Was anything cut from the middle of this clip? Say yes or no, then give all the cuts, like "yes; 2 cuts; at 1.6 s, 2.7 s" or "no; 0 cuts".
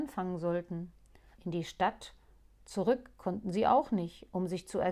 yes; 1 cut; at 1.4 s